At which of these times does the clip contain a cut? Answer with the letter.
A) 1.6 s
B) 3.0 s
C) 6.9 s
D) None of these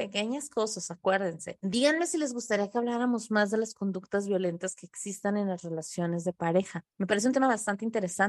C